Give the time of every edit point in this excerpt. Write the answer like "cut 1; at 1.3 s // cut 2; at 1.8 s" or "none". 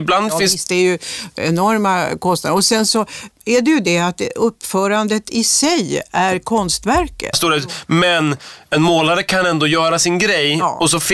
cut 1; at 3.3 s // cut 2; at 7.3 s